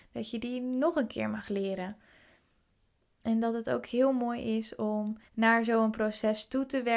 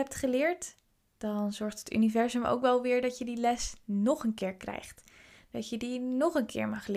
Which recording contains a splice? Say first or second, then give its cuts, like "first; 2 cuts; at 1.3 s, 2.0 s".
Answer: first; 2 cuts; at 3.0 s, 5.3 s